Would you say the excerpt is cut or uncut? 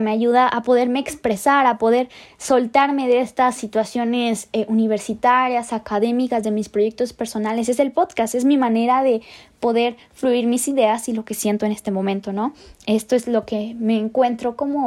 uncut